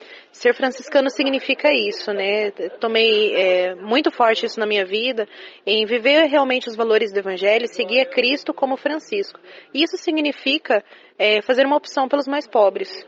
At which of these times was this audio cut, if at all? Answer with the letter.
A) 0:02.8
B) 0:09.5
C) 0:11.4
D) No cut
D